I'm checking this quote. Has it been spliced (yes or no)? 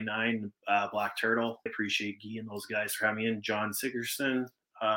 yes